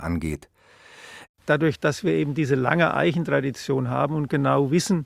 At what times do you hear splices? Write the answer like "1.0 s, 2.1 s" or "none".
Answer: 1.3 s